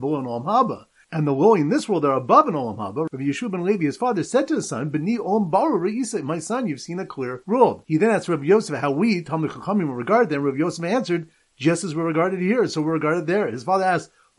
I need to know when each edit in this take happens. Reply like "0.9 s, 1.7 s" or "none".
none